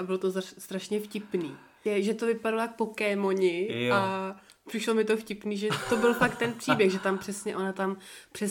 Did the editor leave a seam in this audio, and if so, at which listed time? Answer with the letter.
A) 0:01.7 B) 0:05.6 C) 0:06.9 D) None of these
D